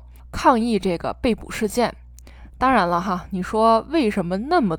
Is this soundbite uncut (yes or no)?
yes